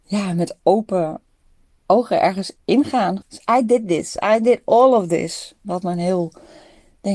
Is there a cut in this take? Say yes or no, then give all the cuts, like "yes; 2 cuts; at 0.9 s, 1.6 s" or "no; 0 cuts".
yes; 1 cut; at 3.2 s